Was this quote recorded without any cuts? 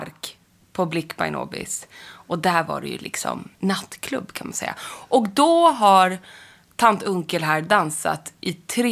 yes; 0 cuts

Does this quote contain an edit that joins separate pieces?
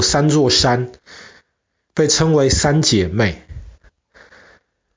no; 0 cuts

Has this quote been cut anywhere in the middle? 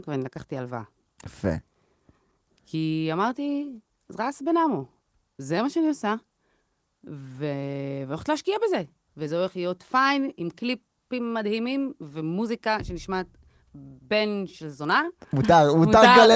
no; 0 cuts

